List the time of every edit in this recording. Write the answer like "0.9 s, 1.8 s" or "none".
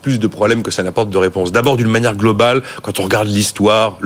none